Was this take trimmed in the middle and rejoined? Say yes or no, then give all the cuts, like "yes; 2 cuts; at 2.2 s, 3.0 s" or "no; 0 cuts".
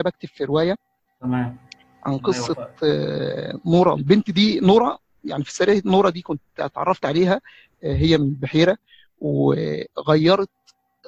yes; 1 cut; at 4.0 s